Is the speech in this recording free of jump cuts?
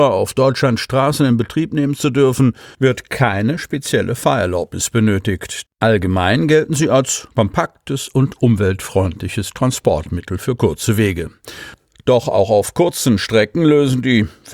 no; 1 cut; at 5.7 s

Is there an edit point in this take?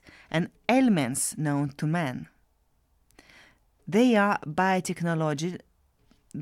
no; 0 cuts

